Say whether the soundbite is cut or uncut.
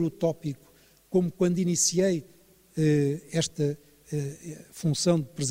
uncut